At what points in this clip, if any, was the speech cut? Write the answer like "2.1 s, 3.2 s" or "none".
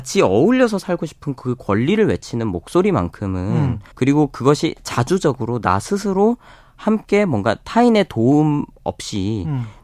3.9 s